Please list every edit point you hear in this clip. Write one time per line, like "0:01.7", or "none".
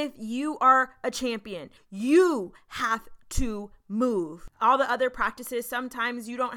0:01.8
0:04.5